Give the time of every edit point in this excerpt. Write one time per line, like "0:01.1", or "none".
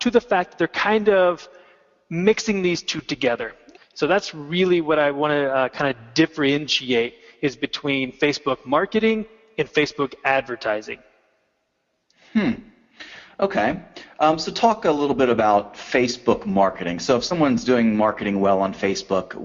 0:03.8